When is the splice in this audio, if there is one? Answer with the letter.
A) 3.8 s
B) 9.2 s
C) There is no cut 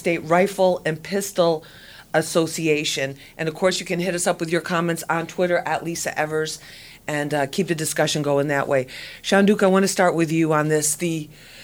C